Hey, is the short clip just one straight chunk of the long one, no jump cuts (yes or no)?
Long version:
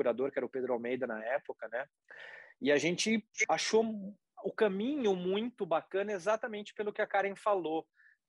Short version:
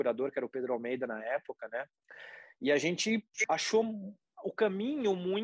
yes